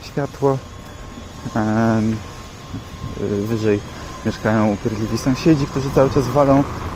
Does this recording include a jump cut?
no; 0 cuts

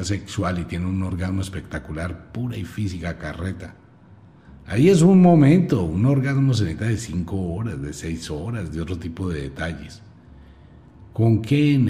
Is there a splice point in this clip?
no; 0 cuts

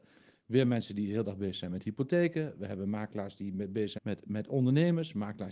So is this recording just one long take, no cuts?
no; 1 cut; at 4.0 s

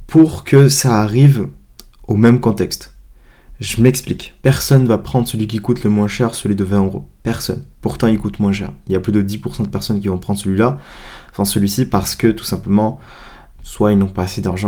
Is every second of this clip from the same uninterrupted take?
no; 2 cuts; at 4.4 s, 13.6 s

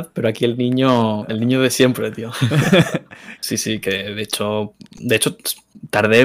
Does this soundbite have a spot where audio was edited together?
yes; 1 cut; at 3.4 s

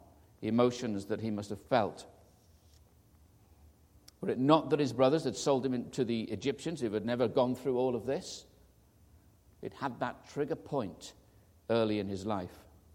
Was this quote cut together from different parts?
no; 0 cuts

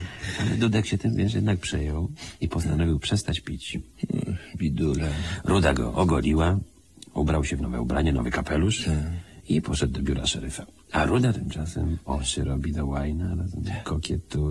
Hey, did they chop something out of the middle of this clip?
no; 0 cuts

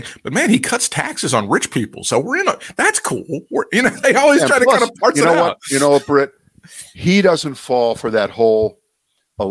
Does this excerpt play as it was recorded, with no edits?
no; 1 cut; at 4.0 s

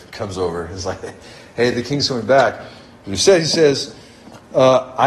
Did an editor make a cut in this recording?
no; 0 cuts

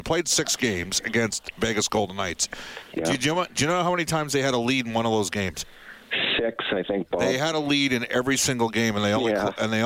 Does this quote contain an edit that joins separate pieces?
no; 0 cuts

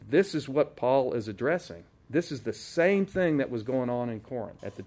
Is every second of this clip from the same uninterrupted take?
yes; 0 cuts

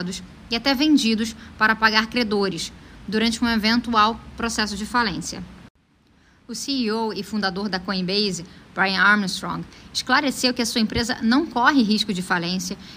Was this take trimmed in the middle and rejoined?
no; 0 cuts

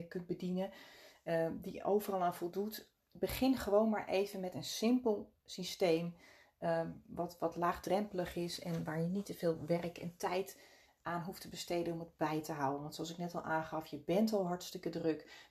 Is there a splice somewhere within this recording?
no; 0 cuts

